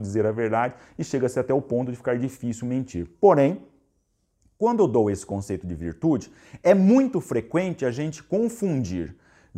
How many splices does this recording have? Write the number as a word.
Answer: zero